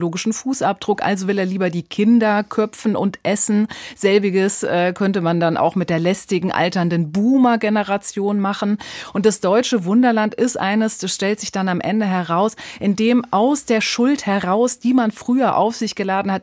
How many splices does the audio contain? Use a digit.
0